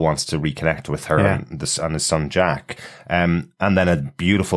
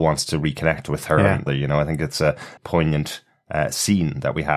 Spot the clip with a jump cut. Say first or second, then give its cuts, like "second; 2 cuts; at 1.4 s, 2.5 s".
second; 2 cuts; at 1.5 s, 2.6 s